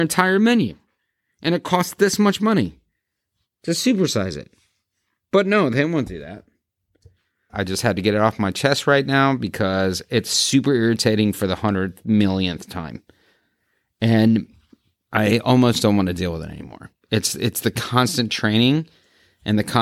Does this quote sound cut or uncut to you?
cut